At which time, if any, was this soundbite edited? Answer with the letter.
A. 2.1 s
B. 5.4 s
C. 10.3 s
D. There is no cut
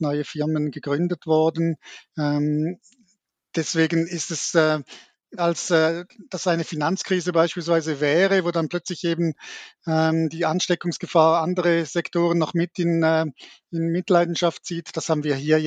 B